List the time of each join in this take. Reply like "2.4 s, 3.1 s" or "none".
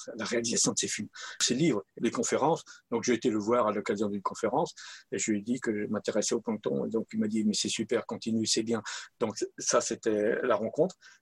2.0 s